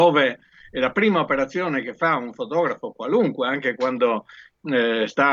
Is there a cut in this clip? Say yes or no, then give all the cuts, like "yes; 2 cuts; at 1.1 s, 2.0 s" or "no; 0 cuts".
no; 0 cuts